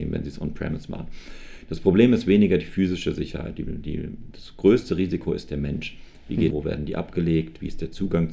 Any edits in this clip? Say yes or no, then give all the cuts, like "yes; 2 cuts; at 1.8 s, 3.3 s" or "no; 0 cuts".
yes; 2 cuts; at 4.3 s, 6.5 s